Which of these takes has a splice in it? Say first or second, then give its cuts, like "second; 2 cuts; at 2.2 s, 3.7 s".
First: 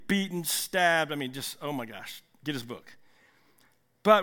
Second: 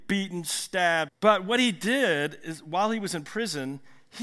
second; 1 cut; at 1.1 s